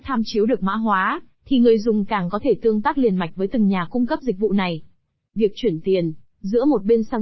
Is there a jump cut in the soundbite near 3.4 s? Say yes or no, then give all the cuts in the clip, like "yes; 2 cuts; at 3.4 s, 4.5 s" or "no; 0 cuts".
no; 2 cuts; at 1.4 s, 5.3 s